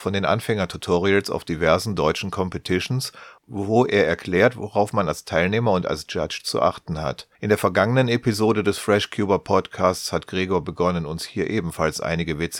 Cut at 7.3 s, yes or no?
yes